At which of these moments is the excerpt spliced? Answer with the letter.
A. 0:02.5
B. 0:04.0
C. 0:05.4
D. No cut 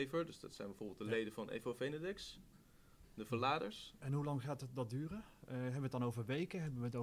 B